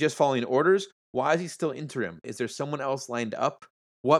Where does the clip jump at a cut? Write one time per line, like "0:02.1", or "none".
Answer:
0:02.2